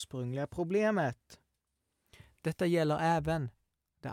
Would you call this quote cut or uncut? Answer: uncut